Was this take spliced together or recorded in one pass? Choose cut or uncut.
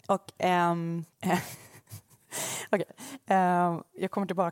cut